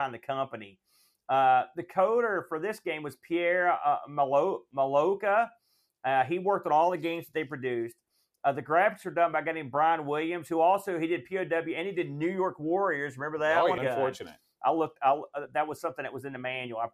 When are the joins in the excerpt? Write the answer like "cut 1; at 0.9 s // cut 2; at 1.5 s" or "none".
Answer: cut 1; at 13.8 s